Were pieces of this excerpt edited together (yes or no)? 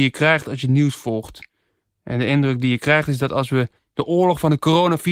no